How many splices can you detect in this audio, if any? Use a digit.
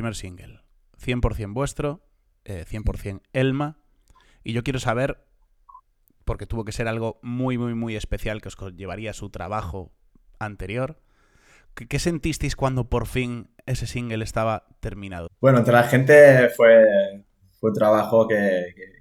1